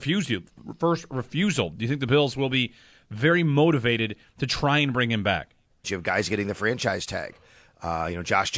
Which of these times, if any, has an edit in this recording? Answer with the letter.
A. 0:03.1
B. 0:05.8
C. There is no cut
B